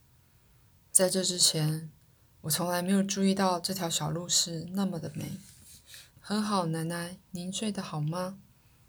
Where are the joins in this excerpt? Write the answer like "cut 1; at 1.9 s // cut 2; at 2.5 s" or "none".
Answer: cut 1; at 6.1 s